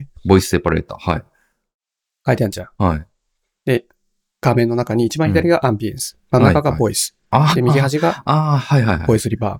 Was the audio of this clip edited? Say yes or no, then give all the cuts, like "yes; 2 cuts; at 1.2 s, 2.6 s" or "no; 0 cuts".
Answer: no; 0 cuts